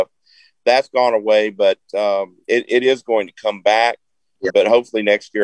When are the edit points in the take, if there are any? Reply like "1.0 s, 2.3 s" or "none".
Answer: 4.5 s